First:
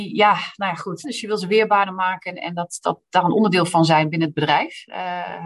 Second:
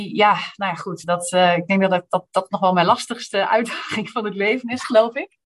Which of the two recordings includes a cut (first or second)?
first